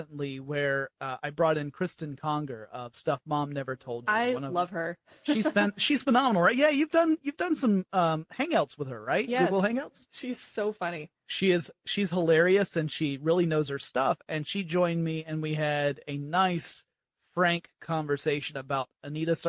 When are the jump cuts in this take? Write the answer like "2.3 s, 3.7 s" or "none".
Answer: none